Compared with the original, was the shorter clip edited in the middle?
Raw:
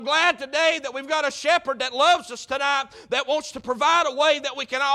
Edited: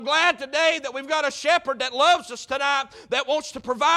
no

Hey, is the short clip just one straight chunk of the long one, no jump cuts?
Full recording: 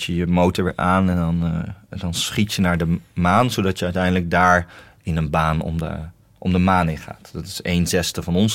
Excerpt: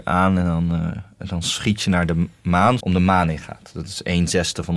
no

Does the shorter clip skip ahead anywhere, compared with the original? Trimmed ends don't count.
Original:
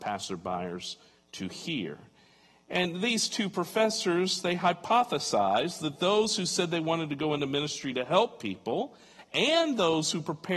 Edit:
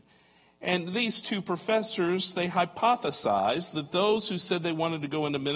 no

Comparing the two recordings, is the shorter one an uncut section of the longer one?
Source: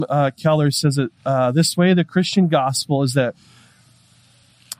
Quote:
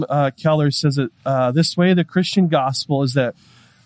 yes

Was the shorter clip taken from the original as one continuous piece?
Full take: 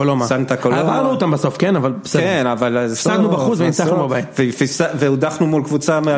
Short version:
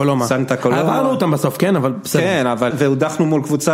no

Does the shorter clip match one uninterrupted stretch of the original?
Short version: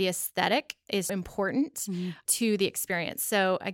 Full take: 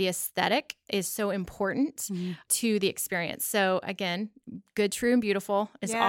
no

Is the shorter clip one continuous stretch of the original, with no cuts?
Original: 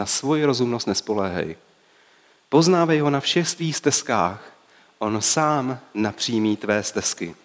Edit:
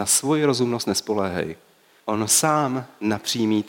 no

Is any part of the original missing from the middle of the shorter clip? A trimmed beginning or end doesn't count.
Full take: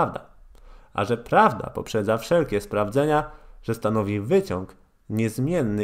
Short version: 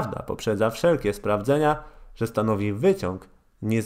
no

